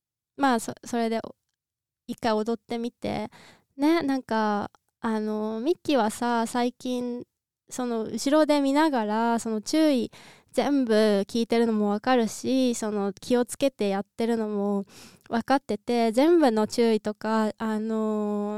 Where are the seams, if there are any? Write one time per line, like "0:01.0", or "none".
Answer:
none